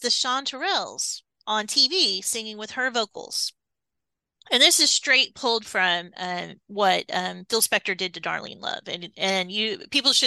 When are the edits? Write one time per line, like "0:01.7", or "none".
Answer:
none